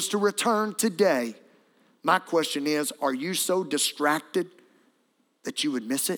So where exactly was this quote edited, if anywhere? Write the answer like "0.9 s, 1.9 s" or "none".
none